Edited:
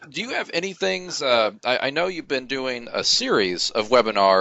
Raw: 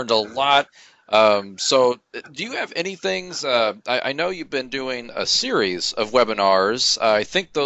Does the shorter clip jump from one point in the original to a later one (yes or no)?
no